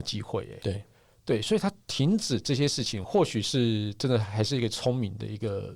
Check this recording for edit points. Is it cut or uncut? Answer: cut